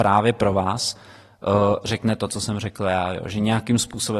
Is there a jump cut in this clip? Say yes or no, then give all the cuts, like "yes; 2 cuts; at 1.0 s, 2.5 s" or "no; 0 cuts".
no; 0 cuts